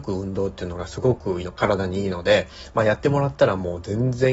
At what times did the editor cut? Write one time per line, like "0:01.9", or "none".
0:01.4